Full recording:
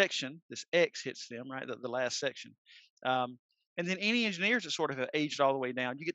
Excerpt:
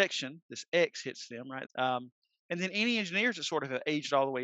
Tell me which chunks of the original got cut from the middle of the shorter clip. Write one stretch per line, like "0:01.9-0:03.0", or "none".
0:01.7-0:02.9